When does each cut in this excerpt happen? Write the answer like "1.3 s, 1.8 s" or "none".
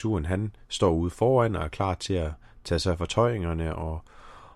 none